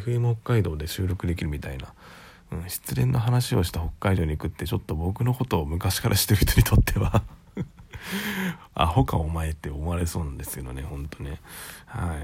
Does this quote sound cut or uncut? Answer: uncut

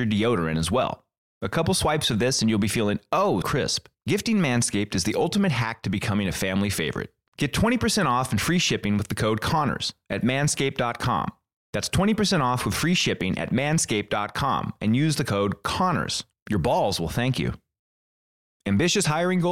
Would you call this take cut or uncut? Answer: cut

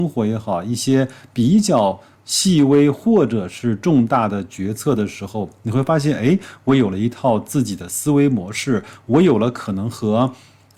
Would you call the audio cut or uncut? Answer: uncut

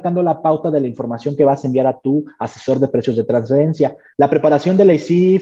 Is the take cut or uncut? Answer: cut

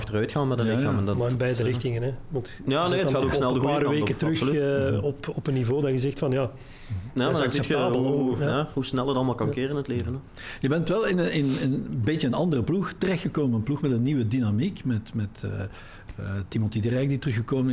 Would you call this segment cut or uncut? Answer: uncut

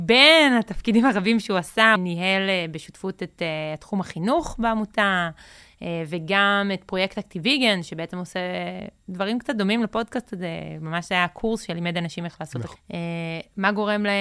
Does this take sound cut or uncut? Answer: cut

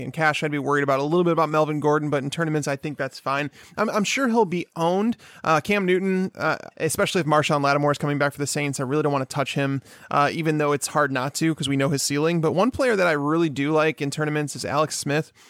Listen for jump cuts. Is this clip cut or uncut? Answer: cut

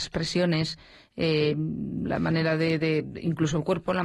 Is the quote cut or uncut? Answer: uncut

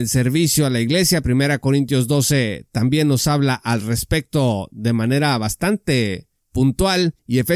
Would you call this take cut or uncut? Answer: uncut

